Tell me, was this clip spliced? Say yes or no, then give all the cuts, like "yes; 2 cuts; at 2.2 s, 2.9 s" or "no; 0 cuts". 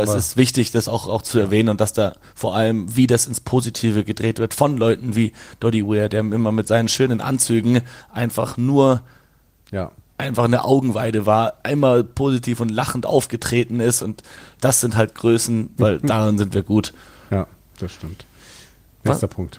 yes; 3 cuts; at 14.0 s, 15.8 s, 17.3 s